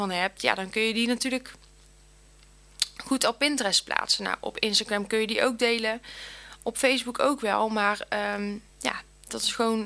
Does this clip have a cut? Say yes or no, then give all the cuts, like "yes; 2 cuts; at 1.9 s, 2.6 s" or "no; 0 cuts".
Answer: yes; 1 cut; at 8.7 s